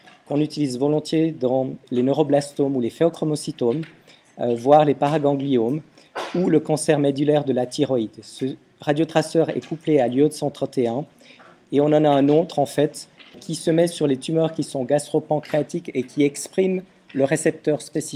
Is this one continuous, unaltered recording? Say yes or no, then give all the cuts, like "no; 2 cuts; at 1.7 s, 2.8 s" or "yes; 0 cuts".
no; 1 cut; at 13.3 s